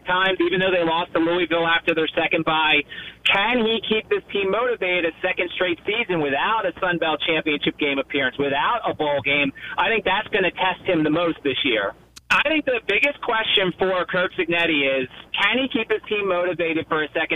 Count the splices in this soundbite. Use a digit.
1